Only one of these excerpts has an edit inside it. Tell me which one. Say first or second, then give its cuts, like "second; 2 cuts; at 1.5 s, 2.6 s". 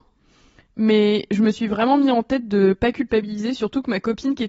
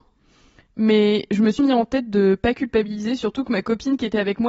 second; 1 cut; at 1.6 s